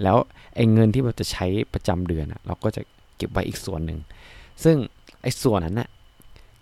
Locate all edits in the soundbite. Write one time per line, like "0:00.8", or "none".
0:05.6